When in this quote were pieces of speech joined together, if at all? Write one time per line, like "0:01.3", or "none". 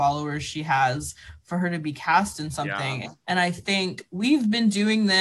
0:03.2